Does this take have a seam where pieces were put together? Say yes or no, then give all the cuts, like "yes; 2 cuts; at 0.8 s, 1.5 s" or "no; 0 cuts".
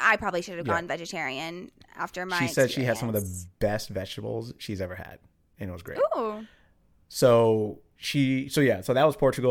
no; 0 cuts